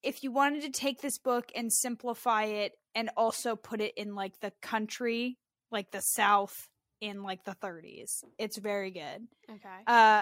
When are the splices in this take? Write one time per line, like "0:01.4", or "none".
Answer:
none